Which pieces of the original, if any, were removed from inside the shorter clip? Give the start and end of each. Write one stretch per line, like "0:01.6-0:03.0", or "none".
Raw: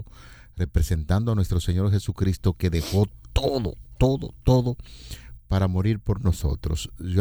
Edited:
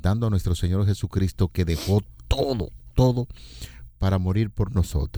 0:04.0-0:04.4